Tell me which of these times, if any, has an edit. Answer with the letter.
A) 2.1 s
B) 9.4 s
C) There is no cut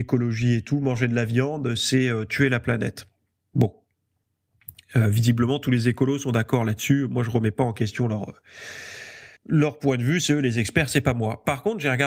B